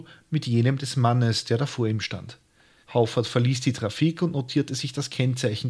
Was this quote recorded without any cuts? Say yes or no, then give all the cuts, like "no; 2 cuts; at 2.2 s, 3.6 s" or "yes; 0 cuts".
no; 1 cut; at 2.8 s